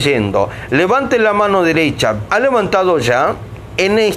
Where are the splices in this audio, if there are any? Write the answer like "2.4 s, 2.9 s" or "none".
2.3 s